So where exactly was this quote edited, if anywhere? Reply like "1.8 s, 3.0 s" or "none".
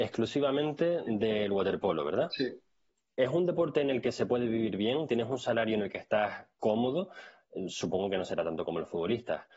none